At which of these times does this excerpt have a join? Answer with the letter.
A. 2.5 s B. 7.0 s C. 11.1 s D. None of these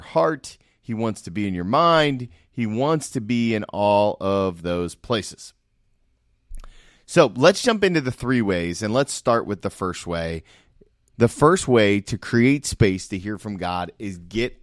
C